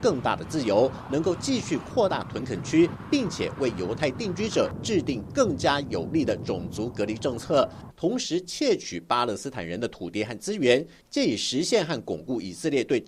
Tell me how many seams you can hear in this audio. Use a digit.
1